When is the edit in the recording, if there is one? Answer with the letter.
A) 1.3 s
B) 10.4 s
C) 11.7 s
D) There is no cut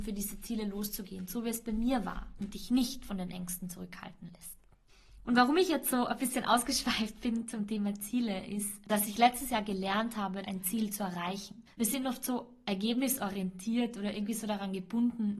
B